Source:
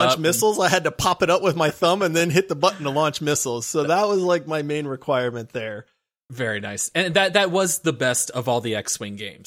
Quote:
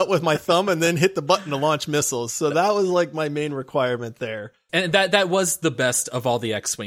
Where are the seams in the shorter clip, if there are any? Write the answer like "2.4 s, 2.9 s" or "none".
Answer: 4.7 s